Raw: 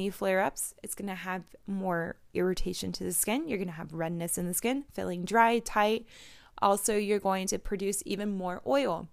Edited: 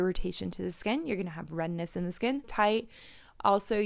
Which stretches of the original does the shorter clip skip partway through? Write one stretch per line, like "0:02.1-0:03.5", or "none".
0:04.9-0:05.6